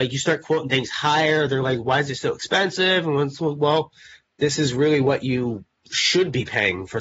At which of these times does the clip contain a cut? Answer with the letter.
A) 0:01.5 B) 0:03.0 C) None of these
C